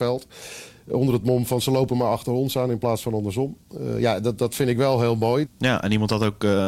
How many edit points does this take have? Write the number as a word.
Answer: one